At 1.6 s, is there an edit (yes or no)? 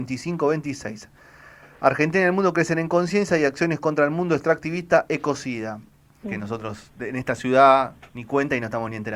no